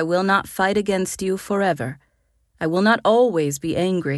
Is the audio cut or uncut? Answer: uncut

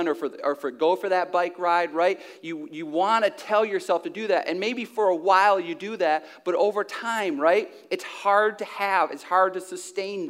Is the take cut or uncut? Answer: uncut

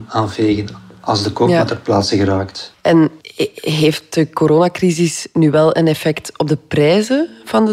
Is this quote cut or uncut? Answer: cut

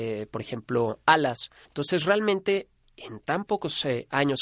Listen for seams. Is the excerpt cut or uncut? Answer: cut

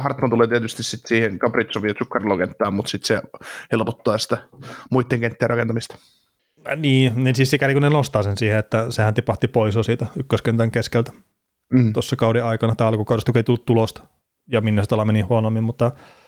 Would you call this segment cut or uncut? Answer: uncut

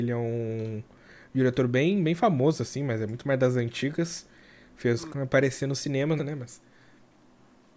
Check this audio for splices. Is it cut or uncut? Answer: cut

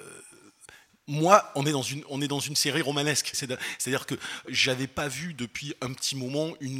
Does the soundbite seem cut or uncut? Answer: cut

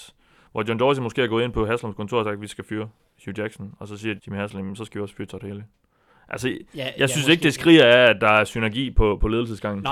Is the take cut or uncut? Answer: cut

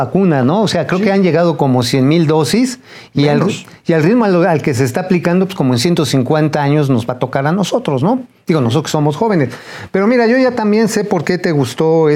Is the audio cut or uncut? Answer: uncut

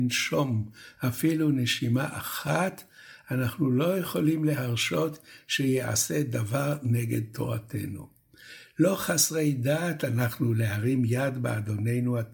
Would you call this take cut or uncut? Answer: uncut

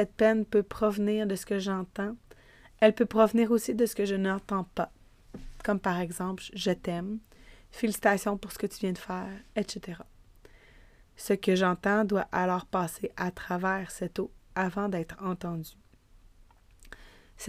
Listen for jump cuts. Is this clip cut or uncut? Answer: cut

